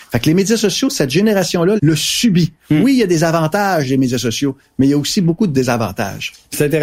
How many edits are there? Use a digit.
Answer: 1